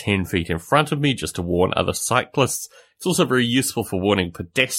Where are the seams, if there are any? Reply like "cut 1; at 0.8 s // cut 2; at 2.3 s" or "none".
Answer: none